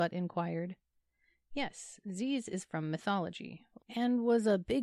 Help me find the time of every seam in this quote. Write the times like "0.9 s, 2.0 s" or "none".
3.8 s